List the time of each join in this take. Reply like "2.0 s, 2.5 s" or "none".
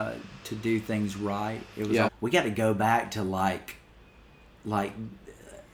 2.1 s